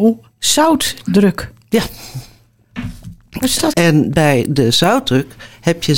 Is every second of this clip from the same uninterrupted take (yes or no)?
no